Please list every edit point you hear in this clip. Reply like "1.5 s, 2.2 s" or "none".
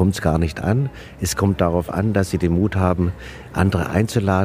none